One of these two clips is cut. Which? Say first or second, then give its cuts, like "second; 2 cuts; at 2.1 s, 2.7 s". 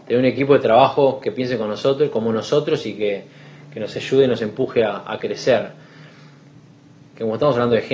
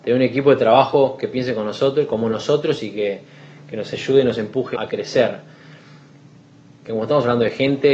second; 1 cut; at 4.7 s